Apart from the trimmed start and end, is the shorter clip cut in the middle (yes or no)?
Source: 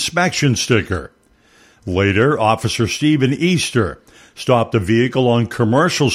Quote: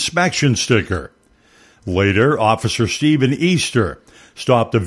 no